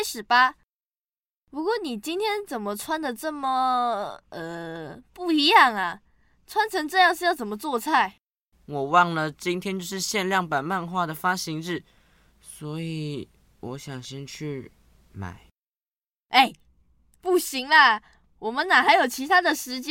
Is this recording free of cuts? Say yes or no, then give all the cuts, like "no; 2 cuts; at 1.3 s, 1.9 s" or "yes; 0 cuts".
no; 1 cut; at 8.5 s